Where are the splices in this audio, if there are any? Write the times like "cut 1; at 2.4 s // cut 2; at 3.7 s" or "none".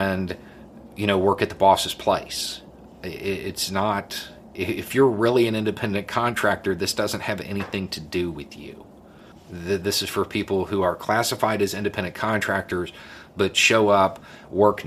cut 1; at 9.3 s